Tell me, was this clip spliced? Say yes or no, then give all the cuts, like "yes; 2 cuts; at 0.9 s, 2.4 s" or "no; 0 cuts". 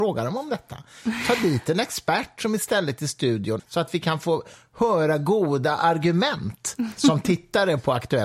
yes; 1 cut; at 3.6 s